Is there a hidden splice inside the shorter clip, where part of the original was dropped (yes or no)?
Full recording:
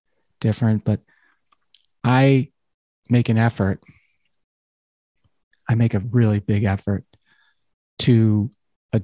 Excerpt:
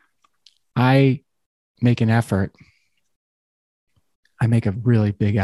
no